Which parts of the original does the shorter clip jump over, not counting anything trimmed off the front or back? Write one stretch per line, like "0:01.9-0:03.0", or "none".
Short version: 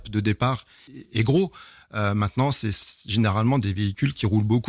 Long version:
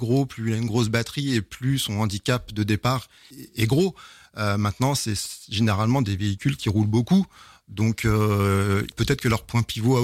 none